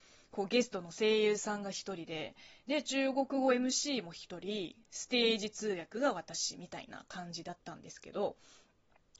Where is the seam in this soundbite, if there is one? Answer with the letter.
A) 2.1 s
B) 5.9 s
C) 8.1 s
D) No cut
D